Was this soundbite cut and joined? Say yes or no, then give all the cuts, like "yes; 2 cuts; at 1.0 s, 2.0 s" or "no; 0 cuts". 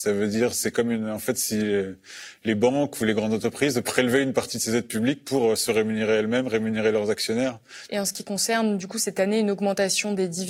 yes; 1 cut; at 7.9 s